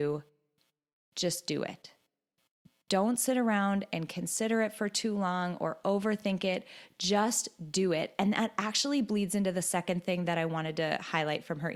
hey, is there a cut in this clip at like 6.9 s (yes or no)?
no